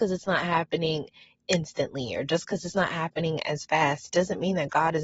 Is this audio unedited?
yes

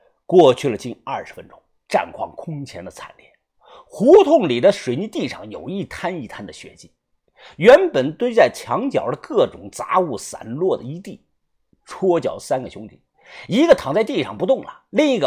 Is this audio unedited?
yes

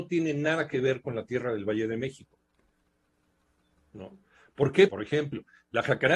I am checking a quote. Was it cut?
yes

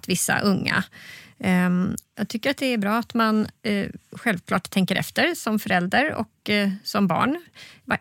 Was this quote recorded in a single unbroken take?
no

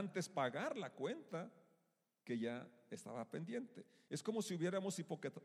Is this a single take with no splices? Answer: yes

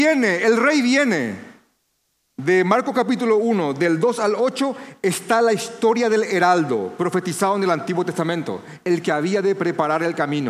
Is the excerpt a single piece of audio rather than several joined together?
no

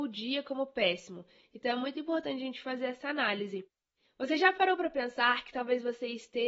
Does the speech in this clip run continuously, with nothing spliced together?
no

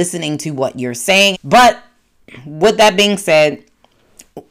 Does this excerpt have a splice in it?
yes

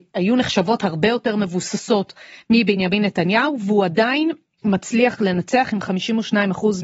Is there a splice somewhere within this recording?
no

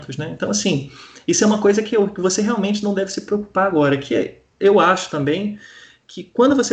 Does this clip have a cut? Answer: no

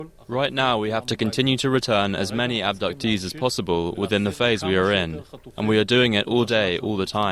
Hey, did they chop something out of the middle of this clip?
no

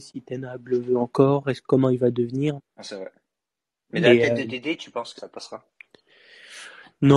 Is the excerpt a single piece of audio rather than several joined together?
no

